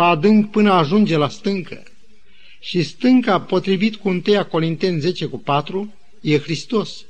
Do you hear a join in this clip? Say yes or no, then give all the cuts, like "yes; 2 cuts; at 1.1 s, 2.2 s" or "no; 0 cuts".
no; 0 cuts